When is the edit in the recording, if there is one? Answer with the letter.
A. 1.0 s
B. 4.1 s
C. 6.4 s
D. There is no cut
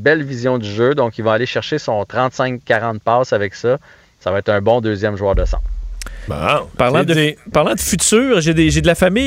D